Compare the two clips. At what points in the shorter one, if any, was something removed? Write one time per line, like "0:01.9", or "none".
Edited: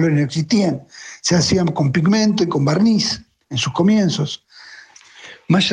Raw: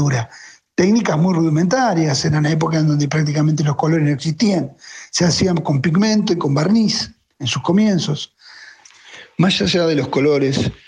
none